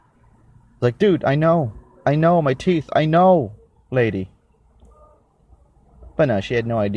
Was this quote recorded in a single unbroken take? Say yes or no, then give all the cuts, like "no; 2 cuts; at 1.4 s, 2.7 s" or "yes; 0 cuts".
yes; 0 cuts